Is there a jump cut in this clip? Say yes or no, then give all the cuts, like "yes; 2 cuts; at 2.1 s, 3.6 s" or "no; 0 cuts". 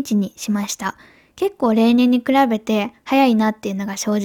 no; 0 cuts